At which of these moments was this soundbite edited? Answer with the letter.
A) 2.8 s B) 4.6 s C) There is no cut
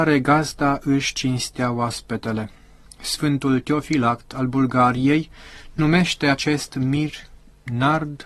A